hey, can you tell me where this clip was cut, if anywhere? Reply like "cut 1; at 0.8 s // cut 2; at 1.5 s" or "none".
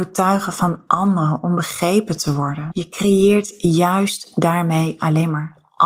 cut 1; at 2.7 s